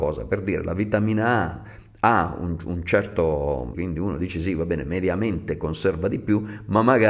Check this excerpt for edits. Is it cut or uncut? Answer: cut